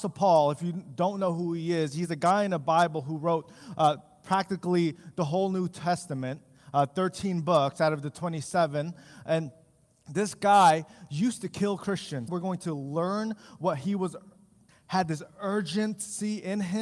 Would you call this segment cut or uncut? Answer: cut